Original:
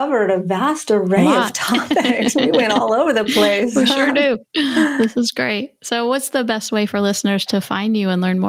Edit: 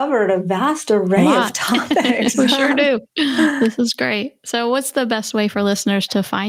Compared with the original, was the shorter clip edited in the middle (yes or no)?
yes